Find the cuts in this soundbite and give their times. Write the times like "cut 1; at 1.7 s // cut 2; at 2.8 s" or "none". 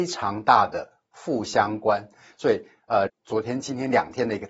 cut 1; at 3.1 s